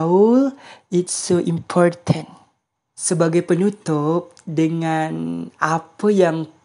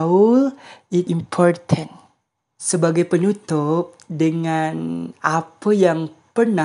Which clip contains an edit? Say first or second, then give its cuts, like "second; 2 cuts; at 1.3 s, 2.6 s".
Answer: second; 1 cut; at 1.1 s